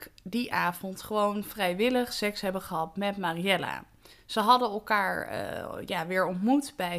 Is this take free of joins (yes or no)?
yes